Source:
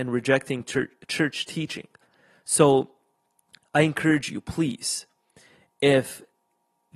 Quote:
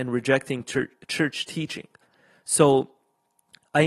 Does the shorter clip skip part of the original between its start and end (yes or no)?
no